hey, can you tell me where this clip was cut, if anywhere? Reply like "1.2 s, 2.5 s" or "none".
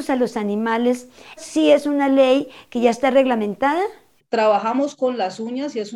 1.4 s, 4.2 s